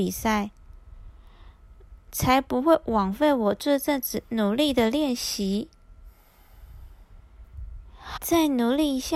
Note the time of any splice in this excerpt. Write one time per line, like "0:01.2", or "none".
0:02.0
0:08.2